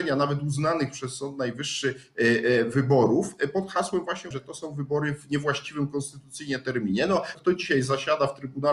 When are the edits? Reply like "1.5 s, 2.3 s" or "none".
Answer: 4.3 s, 7.3 s